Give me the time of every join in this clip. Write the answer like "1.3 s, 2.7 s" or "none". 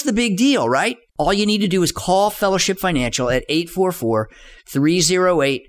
1.1 s